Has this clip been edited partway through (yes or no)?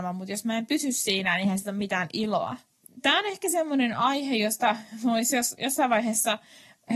no